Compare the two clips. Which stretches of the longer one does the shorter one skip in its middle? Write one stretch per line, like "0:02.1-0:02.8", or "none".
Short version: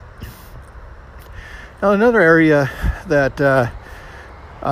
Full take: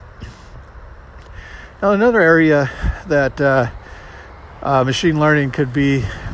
none